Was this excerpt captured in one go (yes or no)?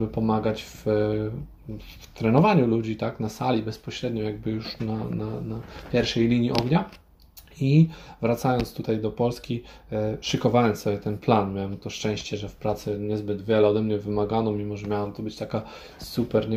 yes